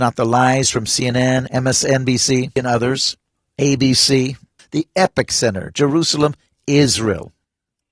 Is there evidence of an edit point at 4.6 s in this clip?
yes; 1 cut; at 4.6 s

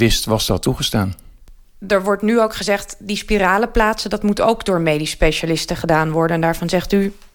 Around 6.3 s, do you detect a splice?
no; 0 cuts

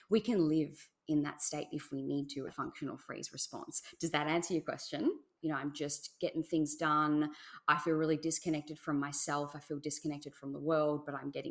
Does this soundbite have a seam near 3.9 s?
no; 2 cuts; at 2.5 s, 5.4 s

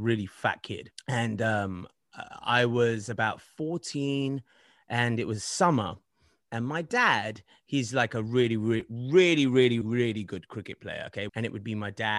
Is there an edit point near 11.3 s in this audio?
yes; 2 cuts; at 9.8 s, 11.3 s

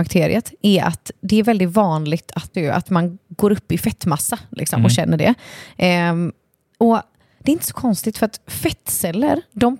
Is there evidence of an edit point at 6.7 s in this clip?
no; 1 cut; at 2.5 s

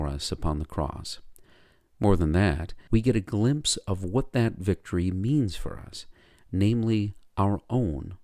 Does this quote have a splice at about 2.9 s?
yes; 1 cut; at 2.9 s

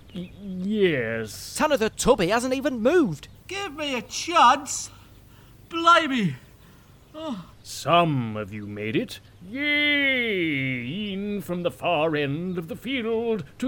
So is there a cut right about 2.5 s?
no; 1 cut; at 7.5 s

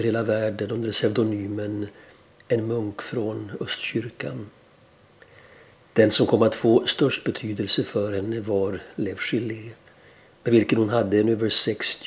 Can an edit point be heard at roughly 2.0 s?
no; 1 cut; at 5.7 s

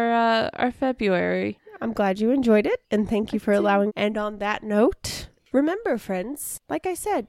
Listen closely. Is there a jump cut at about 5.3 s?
no; 1 cut; at 3.9 s

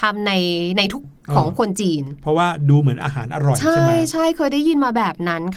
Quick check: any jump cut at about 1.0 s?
yes; 1 cut; at 1.0 s

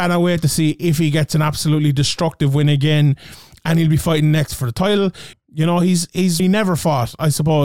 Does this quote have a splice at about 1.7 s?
no; 2 cuts; at 5.3 s, 6.4 s

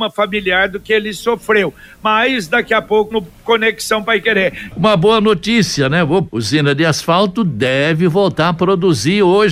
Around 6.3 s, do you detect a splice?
yes; 3 cuts; at 3.1 s, 4.7 s, 6.3 s

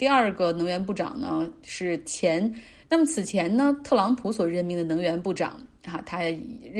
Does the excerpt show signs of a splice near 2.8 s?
yes; 1 cut; at 2.8 s

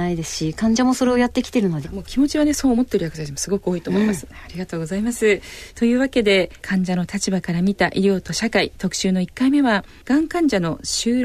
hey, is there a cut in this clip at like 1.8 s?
yes; 2 cuts; at 1.8 s, 4.3 s

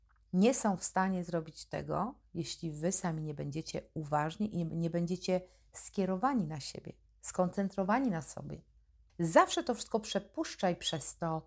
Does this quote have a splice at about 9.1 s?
yes; 1 cut; at 9.1 s

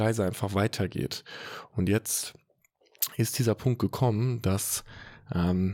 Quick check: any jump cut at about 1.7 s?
yes; 1 cut; at 1.7 s

